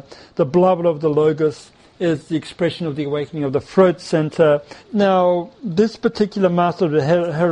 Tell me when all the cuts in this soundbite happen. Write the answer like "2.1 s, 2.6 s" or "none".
4.8 s